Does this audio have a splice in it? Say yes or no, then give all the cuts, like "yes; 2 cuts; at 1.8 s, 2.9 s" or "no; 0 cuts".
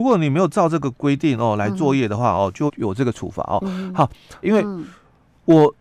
yes; 2 cuts; at 2.7 s, 4.4 s